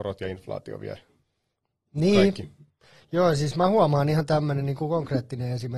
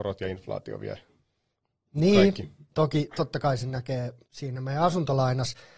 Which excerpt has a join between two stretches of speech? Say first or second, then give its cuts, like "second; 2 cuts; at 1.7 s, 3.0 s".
second; 2 cuts; at 2.7 s, 4.2 s